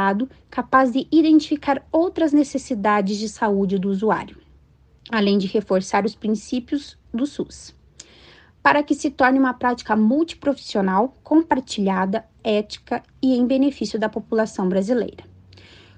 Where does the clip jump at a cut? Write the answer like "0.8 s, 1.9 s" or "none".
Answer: none